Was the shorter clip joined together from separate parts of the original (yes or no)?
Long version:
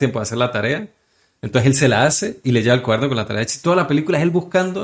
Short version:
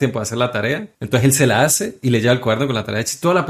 yes